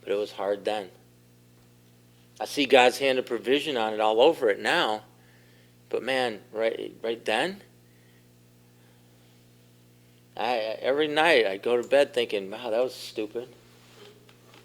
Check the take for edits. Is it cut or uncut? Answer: uncut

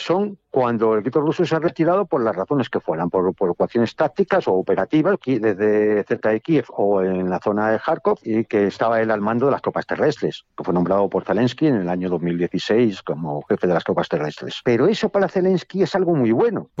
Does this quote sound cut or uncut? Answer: cut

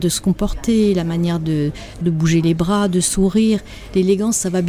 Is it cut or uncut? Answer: cut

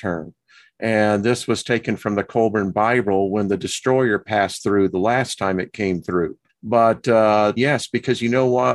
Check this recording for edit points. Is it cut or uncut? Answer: cut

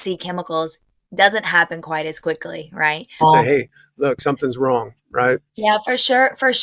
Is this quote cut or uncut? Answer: cut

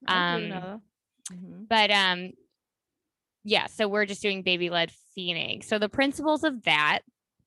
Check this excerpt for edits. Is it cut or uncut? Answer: uncut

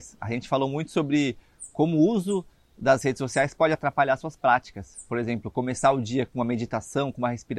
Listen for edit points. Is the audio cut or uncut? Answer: uncut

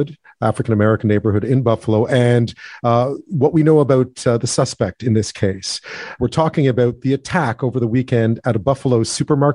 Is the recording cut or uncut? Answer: cut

